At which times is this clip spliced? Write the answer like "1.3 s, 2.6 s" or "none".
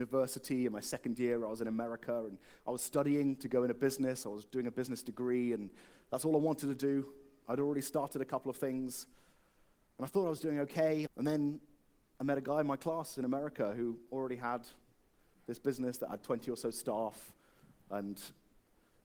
11.1 s